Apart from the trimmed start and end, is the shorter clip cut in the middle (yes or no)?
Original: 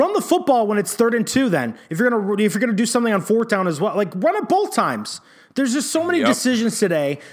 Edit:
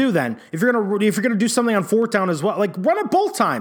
no